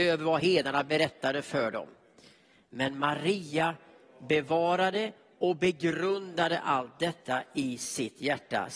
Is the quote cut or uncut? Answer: uncut